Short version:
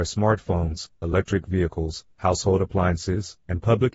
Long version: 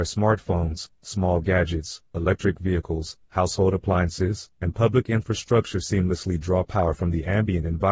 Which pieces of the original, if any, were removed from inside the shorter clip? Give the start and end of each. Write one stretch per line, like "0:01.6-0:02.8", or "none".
0:00.9-0:02.1